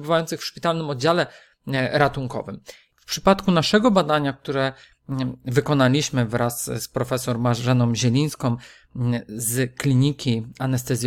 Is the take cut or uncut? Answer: cut